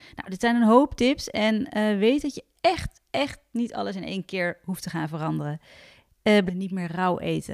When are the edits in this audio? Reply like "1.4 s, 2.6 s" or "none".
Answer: 6.5 s